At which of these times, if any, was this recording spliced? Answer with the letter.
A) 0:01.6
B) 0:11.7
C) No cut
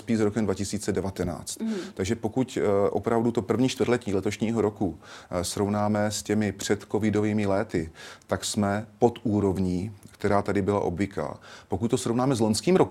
C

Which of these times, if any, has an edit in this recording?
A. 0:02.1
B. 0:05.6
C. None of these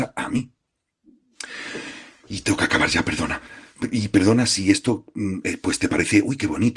C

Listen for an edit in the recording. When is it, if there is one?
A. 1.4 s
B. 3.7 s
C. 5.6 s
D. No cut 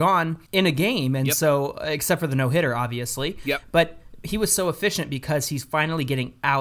D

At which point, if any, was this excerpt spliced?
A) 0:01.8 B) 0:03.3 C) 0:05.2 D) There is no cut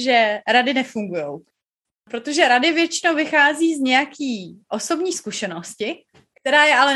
A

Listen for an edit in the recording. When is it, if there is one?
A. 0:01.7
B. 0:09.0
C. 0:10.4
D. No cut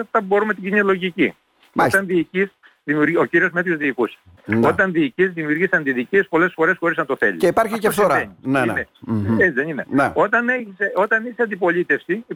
D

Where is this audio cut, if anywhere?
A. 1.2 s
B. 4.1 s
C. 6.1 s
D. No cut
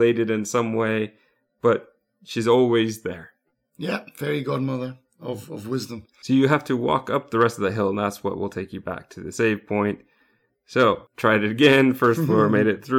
D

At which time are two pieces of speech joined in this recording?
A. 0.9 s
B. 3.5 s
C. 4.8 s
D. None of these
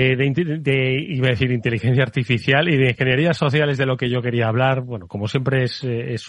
D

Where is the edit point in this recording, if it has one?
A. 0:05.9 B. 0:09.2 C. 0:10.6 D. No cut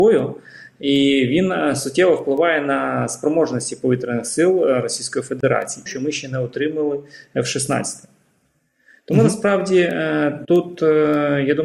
A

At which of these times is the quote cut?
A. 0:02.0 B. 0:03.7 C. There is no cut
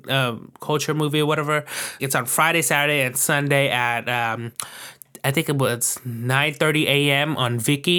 A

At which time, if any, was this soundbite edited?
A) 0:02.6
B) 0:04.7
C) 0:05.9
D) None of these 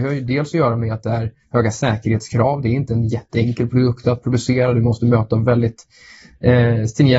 D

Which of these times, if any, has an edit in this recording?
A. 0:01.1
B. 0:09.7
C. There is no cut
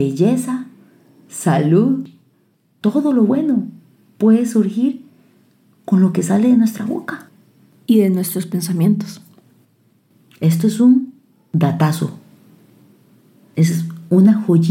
C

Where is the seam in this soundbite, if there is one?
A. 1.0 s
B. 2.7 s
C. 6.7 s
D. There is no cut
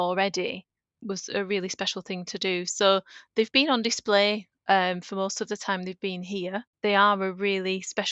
A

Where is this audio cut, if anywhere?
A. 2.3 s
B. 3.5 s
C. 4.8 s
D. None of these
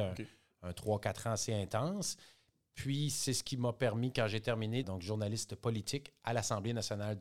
C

